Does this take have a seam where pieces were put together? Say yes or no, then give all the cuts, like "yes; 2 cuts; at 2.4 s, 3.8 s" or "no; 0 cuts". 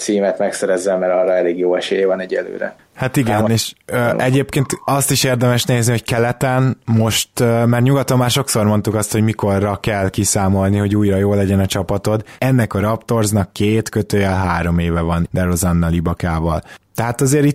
yes; 2 cuts; at 12.4 s, 15.3 s